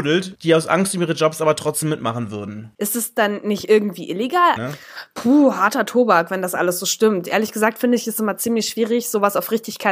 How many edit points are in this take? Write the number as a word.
two